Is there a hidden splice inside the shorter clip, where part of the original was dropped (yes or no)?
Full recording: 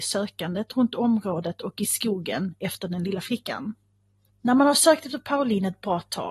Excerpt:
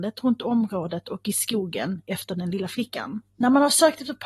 yes